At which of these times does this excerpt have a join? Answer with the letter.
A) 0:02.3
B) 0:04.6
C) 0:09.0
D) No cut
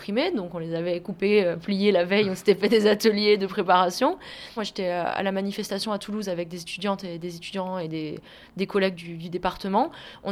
B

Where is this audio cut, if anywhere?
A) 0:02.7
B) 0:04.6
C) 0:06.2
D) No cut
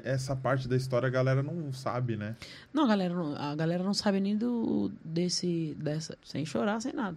C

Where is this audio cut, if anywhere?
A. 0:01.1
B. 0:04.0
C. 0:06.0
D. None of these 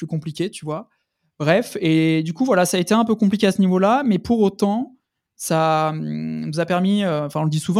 D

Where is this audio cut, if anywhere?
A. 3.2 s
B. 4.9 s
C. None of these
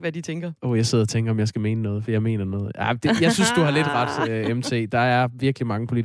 C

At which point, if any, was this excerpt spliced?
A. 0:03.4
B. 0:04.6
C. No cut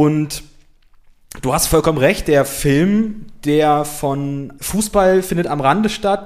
B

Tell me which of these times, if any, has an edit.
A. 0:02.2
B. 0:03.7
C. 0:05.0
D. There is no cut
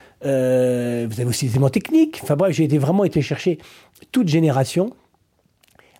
A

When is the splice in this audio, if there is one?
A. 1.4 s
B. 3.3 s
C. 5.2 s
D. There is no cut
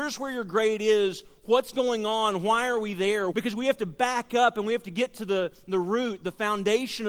B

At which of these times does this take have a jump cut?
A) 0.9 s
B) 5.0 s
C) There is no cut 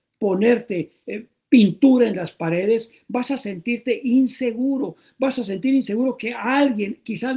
C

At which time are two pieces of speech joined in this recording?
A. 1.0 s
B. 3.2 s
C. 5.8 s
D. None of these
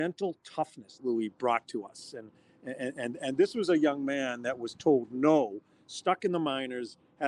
A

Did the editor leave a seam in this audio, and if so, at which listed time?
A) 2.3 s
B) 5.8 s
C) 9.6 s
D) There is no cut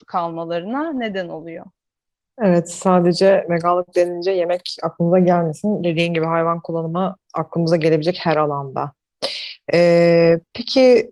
D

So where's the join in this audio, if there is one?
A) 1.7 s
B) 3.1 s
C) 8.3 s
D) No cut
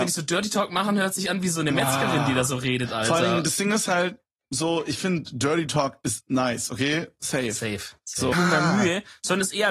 C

